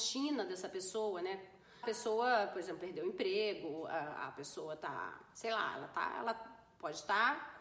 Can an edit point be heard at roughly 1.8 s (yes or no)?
yes